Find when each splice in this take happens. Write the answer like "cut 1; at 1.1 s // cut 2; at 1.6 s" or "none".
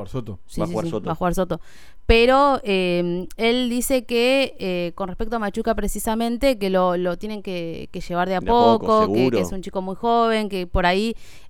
none

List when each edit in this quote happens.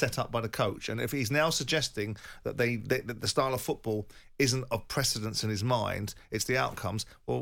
none

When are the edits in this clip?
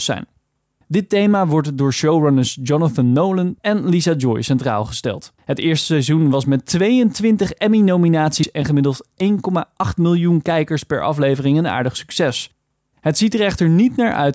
cut 1; at 3.6 s // cut 2; at 5.4 s

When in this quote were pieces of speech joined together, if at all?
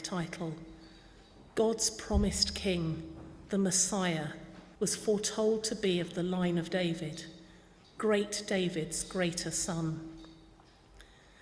cut 1; at 4.8 s // cut 2; at 7.8 s

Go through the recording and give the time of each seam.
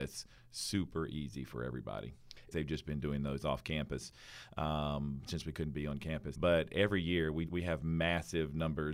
cut 1; at 2.5 s // cut 2; at 6.3 s // cut 3; at 7.5 s

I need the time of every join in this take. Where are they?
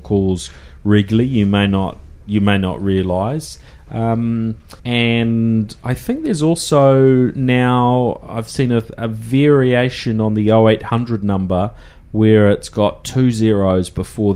cut 1; at 4.8 s

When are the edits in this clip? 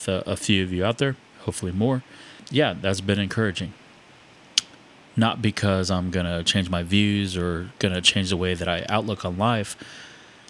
none

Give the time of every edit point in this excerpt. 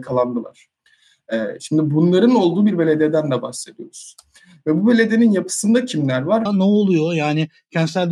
cut 1; at 6.5 s

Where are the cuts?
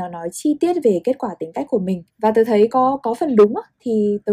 cut 1; at 2.1 s

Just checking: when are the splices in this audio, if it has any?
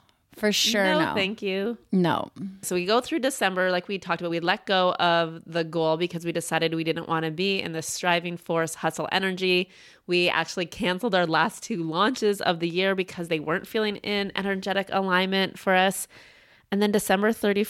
none

